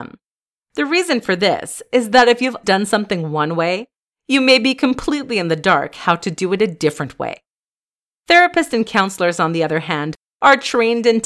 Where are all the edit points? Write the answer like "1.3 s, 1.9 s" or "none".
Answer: 2.6 s